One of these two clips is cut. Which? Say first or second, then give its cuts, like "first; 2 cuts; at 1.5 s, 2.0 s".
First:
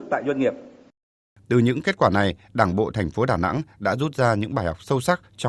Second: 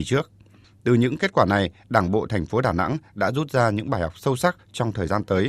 first; 1 cut; at 1.4 s